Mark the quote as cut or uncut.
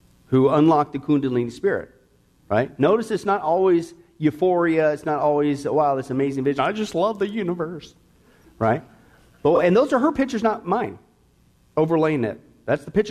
uncut